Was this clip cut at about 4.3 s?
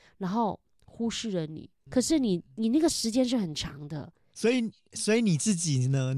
yes; 2 cuts; at 1.9 s, 4.3 s

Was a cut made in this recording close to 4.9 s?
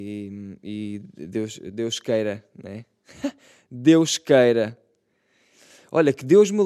no; 0 cuts

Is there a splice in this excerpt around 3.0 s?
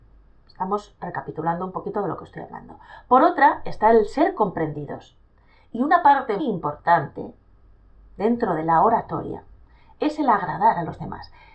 no; 1 cut; at 6.4 s

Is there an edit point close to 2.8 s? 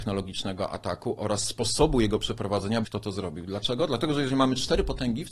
yes; 1 cut; at 2.8 s

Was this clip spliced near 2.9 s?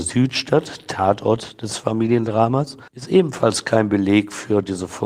yes; 1 cut; at 2.9 s

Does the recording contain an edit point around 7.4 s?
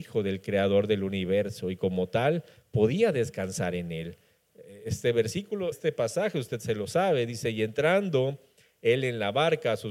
no; 1 cut; at 5.7 s

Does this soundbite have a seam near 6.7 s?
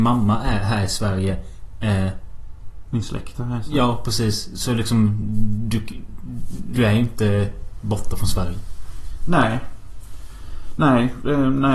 yes; 1 cut; at 6.7 s

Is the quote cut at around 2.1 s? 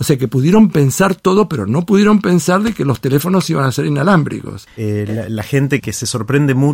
no; 2 cuts; at 4.7 s, 5.8 s

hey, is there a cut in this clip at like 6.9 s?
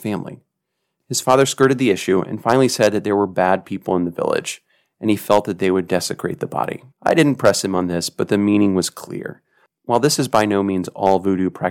yes; 1 cut; at 6.9 s

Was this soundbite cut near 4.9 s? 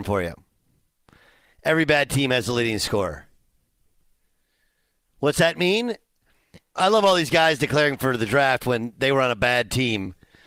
no; 1 cut; at 6.8 s

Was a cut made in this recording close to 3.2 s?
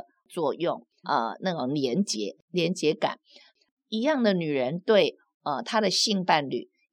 no; 1 cut; at 1.0 s

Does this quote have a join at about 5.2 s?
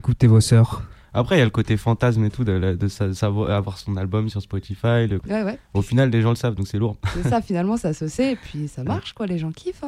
yes; 1 cut; at 5.2 s

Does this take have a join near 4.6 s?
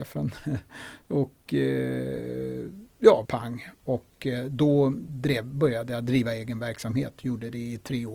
no; 1 cut; at 3.3 s

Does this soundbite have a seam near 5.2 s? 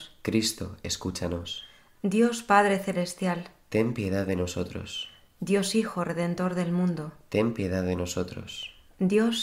no; 0 cuts

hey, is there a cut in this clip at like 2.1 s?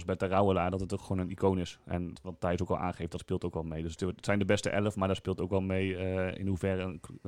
yes; 1 cut; at 2.1 s

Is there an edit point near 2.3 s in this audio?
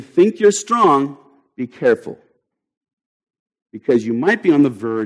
no; 0 cuts

